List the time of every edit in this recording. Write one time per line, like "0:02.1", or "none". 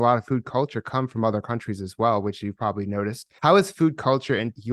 none